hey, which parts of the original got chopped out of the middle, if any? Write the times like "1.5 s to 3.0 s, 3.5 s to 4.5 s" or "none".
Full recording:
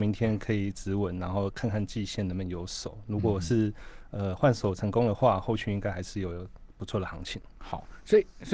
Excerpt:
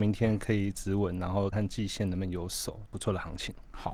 1.5 s to 1.7 s, 3.0 s to 6.7 s